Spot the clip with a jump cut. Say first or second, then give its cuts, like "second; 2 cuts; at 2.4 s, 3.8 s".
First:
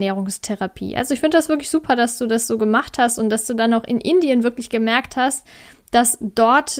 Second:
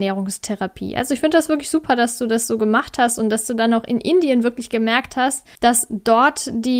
second; 1 cut; at 5.6 s